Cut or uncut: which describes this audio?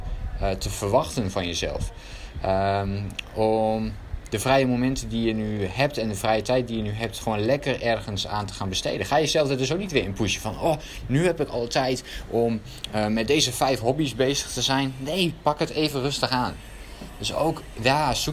uncut